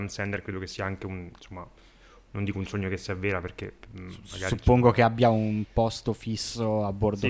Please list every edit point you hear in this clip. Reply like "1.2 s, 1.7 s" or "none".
none